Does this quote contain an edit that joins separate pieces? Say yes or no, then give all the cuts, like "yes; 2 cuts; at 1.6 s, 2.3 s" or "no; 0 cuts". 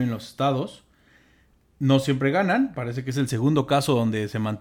no; 0 cuts